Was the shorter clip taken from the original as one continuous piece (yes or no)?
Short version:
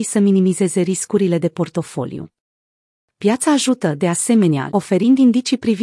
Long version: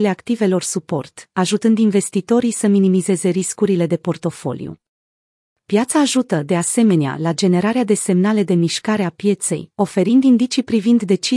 no